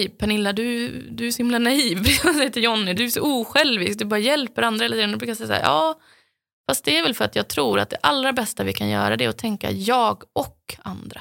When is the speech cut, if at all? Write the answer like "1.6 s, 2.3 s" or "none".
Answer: 2.9 s